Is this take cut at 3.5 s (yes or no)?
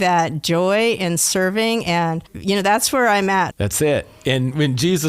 yes